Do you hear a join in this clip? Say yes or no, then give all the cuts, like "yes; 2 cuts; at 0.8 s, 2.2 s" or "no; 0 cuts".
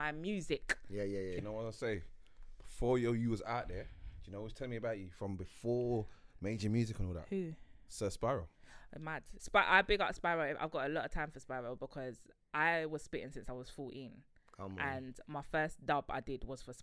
yes; 2 cuts; at 1.4 s, 9.4 s